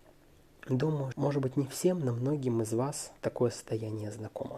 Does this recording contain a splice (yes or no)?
yes